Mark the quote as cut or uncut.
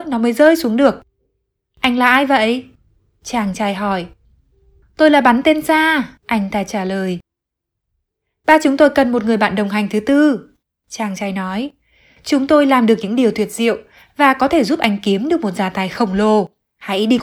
cut